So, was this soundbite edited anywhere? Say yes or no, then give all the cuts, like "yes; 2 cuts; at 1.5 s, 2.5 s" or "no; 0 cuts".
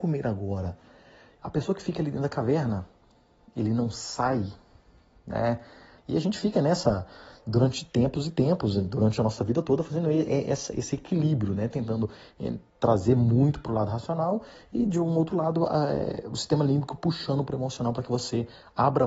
yes; 2 cuts; at 1.4 s, 6.0 s